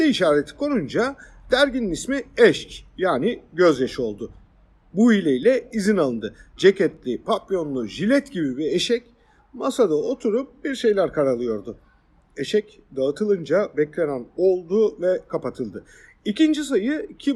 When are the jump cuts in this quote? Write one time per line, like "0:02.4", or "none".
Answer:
0:06.6